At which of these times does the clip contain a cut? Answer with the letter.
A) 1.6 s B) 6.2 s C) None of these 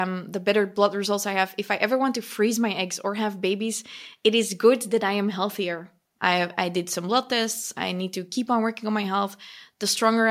B